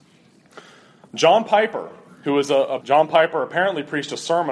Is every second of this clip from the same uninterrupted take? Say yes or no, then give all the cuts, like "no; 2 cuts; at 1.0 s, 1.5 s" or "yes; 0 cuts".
no; 1 cut; at 2.8 s